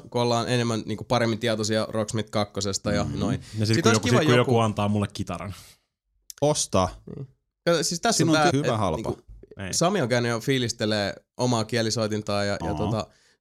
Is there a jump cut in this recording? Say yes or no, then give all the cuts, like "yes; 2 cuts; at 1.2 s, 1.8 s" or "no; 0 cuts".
yes; 1 cut; at 8.5 s